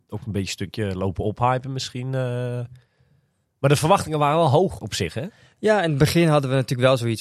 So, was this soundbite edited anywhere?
yes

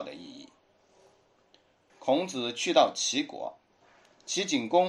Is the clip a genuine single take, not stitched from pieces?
no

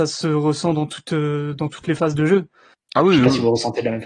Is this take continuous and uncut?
no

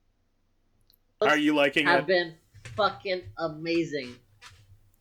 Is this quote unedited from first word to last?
no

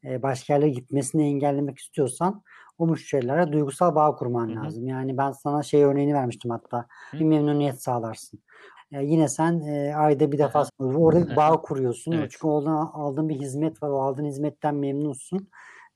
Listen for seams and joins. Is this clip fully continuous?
no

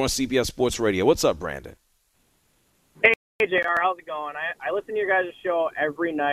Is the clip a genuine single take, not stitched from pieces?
yes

